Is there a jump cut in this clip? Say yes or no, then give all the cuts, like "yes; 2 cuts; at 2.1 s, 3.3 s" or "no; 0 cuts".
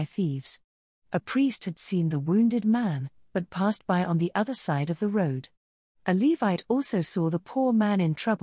no; 0 cuts